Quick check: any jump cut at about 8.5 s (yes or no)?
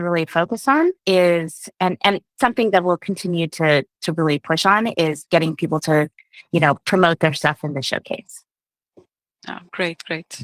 no